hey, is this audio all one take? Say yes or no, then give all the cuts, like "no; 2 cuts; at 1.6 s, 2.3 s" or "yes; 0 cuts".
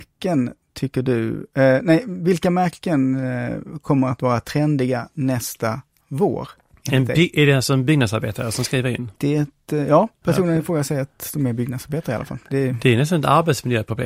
no; 1 cut; at 9.2 s